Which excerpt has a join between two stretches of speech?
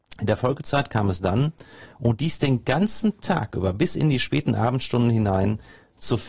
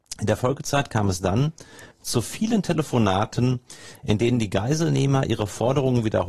second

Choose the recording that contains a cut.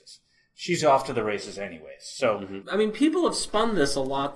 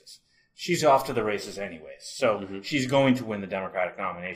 first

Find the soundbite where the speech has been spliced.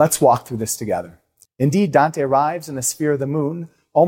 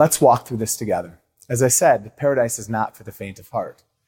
first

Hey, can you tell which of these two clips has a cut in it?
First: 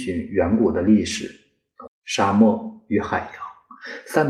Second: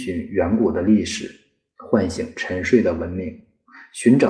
first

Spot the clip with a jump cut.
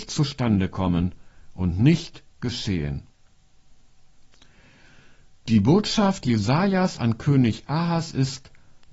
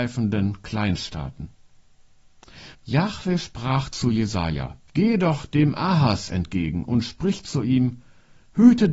second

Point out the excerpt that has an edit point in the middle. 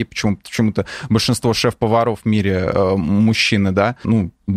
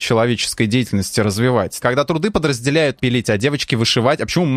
second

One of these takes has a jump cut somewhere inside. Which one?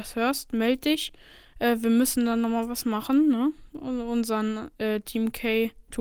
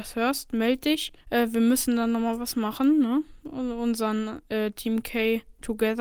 second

